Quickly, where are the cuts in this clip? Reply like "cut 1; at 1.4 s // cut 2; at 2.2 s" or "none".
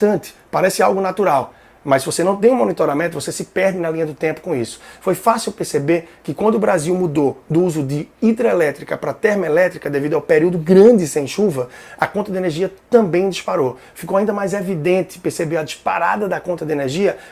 none